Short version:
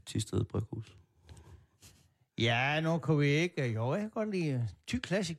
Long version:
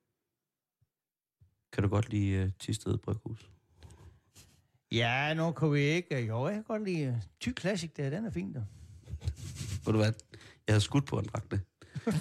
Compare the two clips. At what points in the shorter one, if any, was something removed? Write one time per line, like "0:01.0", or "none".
none